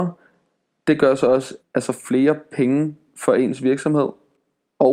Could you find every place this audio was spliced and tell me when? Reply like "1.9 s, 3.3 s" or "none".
1.6 s